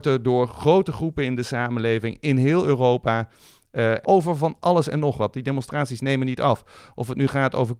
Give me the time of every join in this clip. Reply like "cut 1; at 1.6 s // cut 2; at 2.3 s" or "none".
cut 1; at 4.0 s